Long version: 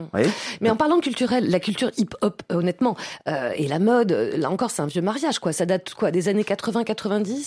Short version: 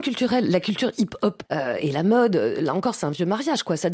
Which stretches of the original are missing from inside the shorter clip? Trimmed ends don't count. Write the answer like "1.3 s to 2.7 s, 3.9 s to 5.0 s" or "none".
2.5 s to 3.2 s